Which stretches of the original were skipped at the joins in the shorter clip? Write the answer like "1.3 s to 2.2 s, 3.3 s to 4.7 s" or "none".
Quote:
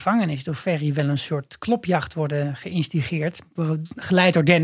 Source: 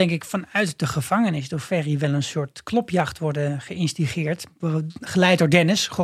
none